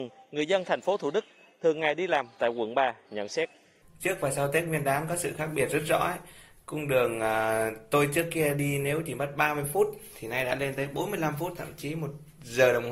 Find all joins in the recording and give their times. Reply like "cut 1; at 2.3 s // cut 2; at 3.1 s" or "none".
none